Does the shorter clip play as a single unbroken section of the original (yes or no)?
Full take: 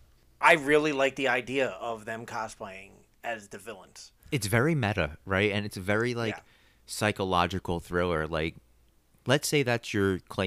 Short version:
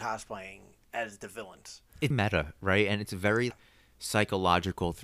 no